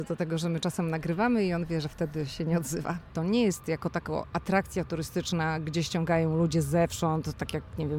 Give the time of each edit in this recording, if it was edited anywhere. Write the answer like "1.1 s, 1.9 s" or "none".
3.1 s